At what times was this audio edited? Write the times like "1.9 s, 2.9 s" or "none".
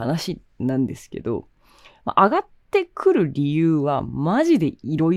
none